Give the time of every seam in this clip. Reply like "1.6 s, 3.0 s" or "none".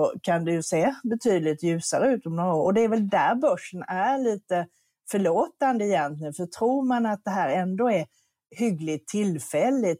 none

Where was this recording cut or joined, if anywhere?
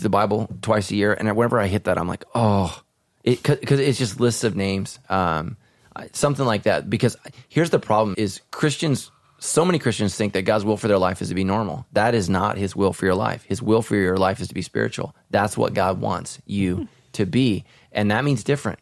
5.0 s, 8.1 s

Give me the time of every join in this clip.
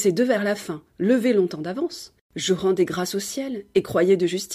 2.3 s

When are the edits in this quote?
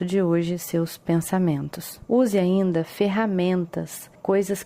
none

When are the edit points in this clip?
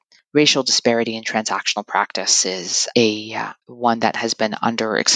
3.6 s

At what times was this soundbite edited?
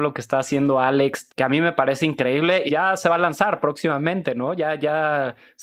1.3 s, 2.7 s

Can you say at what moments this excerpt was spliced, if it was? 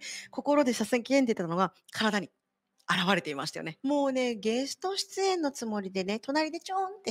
3.8 s

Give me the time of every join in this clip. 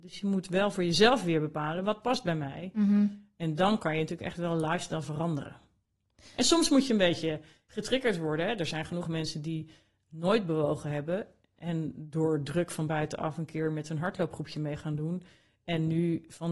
none

